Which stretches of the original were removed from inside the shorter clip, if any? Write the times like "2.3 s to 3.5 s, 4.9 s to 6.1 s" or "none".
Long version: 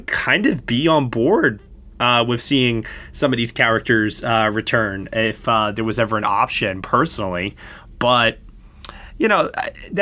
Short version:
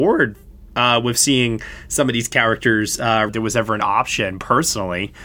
4.5 s to 5.7 s